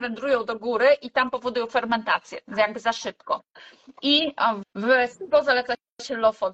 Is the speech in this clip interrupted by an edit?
yes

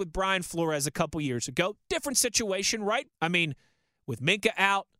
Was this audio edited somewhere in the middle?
yes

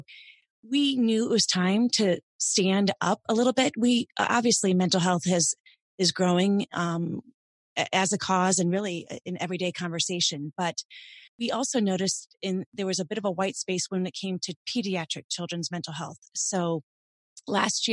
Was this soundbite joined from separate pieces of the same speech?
yes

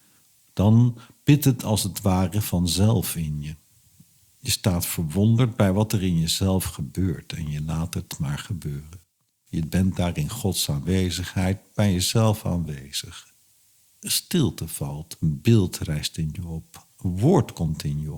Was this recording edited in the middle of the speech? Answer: no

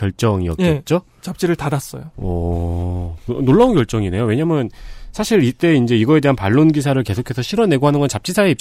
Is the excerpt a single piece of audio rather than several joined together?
yes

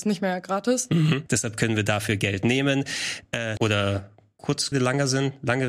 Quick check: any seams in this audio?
yes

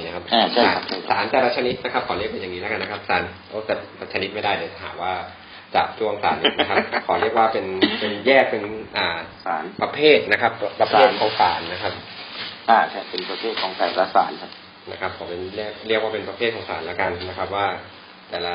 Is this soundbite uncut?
yes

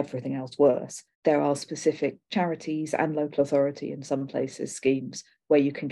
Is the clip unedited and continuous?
no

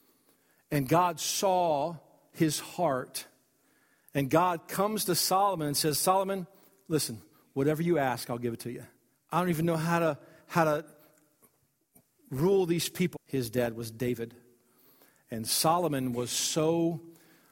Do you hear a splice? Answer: yes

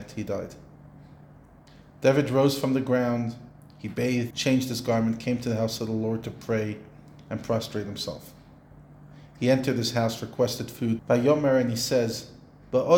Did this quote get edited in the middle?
yes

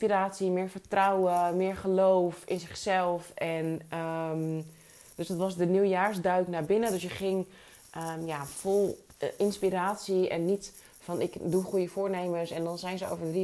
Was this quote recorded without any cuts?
no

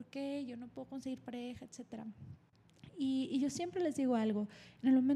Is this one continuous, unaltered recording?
yes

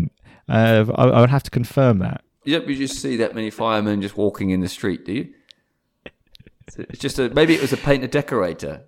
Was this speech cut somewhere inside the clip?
yes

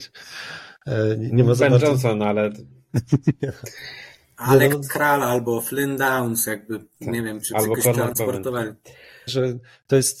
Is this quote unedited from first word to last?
no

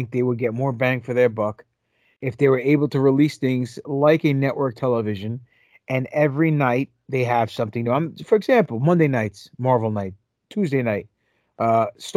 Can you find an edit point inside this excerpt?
no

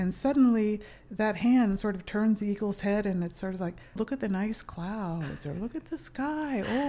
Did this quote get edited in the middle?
yes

